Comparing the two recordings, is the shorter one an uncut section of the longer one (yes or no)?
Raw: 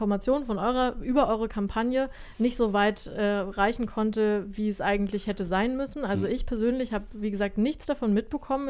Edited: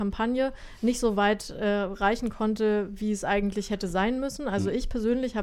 yes